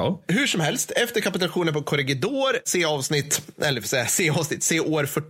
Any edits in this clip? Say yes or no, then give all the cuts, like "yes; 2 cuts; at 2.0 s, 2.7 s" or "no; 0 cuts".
no; 0 cuts